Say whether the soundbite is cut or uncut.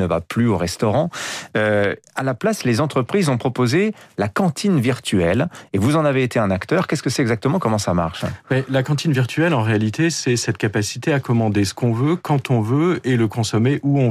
uncut